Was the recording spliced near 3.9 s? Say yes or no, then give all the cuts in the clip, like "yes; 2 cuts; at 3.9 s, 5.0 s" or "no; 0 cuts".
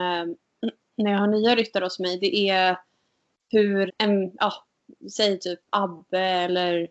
yes; 2 cuts; at 3.9 s, 5.7 s